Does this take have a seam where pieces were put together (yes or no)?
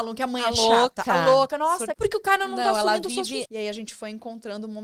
yes